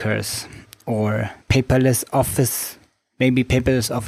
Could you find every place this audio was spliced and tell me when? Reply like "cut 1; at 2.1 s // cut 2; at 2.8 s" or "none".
cut 1; at 1.4 s

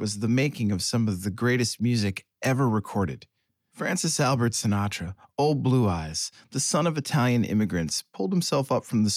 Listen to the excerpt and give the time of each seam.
cut 1; at 3.7 s

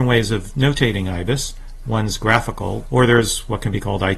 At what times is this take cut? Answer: cut 1; at 2.8 s

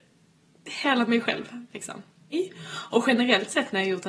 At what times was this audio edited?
cut 1; at 2.3 s

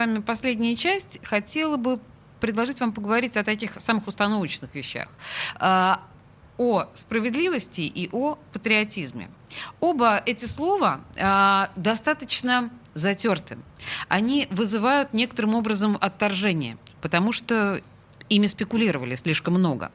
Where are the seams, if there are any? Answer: cut 1; at 16.9 s

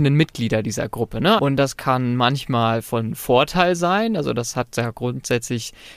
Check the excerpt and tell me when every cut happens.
cut 1; at 1.4 s

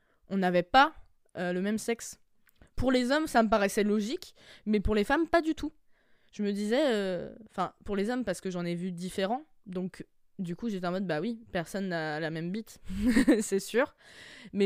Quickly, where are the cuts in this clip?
none

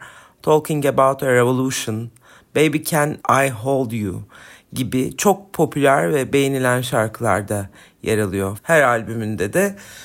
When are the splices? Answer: cut 1; at 8.6 s

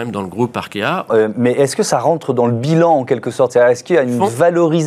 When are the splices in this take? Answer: cut 1; at 1.1 s

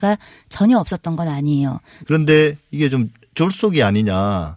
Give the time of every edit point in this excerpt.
cut 1; at 2.0 s

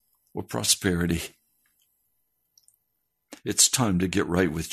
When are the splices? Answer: none

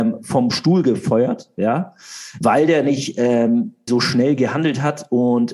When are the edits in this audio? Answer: cut 1; at 2.4 s // cut 2; at 3.9 s

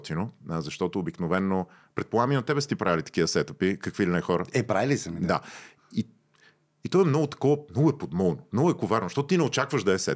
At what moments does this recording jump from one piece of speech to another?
none

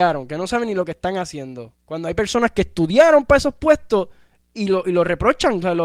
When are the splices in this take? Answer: cut 1; at 1.7 s

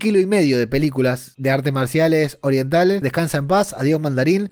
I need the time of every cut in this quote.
cut 1; at 3.0 s

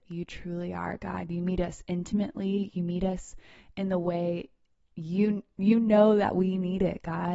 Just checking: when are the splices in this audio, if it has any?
cut 1; at 1.3 s

